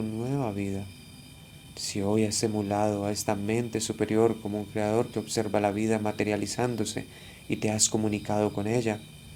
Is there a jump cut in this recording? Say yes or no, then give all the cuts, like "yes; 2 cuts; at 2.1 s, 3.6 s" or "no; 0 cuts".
yes; 1 cut; at 1.7 s